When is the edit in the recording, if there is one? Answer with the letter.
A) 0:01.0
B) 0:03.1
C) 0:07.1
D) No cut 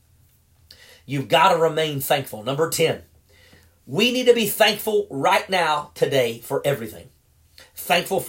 D